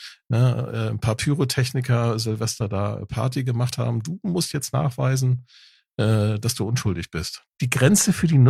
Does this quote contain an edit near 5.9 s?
no; 1 cut; at 7.4 s

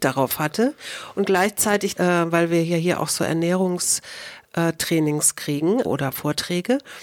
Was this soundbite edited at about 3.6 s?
no; 2 cuts; at 2.0 s, 5.8 s

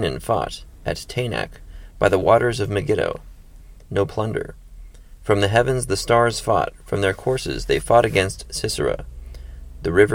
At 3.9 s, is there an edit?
yes; 1 cut; at 3.9 s

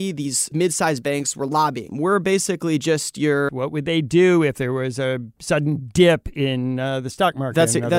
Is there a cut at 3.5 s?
yes; 2 cuts; at 1.9 s, 3.5 s

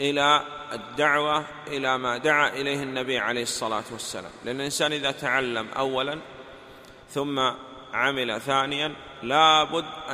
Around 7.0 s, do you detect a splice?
yes; 1 cut; at 7.0 s

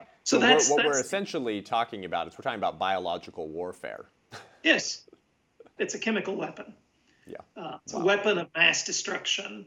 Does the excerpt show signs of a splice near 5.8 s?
yes; 1 cut; at 5.8 s

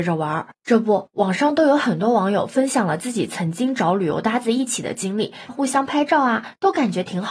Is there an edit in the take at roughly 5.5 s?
yes; 1 cut; at 5.5 s

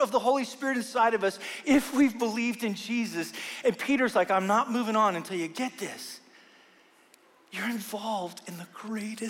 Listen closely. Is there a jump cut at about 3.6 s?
no; 0 cuts

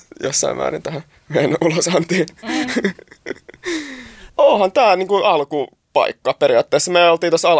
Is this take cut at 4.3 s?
yes; 1 cut; at 4.3 s

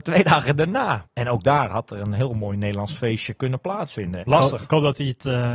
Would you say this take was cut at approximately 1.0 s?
yes; 2 cuts; at 1.0 s, 4.2 s

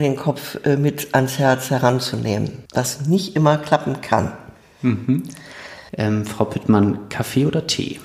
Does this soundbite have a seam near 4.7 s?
no; 2 cuts; at 2.7 s, 5.9 s

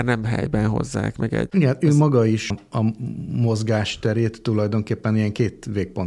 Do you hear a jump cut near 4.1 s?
no; 2 cuts; at 1.5 s, 2.5 s

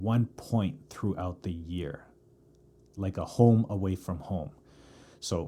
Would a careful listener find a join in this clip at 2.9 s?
yes; 1 cut; at 2.9 s

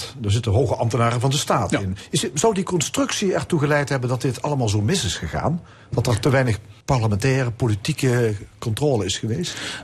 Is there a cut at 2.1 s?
no; 1 cut; at 6.8 s

